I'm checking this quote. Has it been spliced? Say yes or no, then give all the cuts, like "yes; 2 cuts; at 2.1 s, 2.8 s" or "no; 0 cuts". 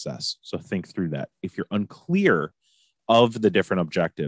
no; 0 cuts